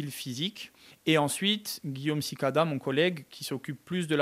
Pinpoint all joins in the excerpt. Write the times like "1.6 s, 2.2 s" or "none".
none